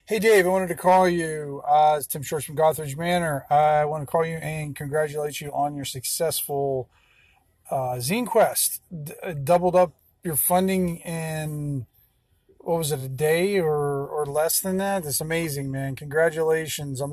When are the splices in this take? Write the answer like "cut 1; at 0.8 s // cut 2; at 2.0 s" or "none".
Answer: none